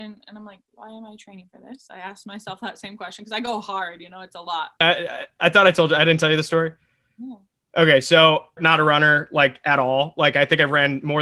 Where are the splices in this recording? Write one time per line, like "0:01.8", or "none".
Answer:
0:04.8
0:08.6